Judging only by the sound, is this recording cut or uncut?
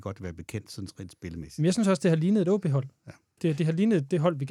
cut